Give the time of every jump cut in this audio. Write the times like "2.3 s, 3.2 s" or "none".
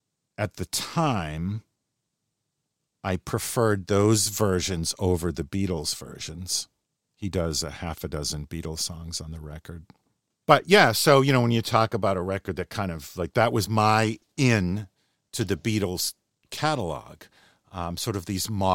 none